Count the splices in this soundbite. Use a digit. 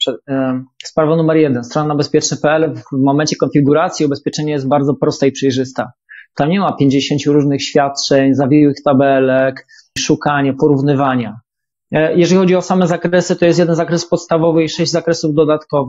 2